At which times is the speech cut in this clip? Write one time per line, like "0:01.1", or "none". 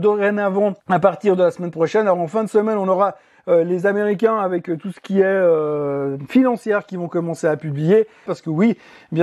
0:08.3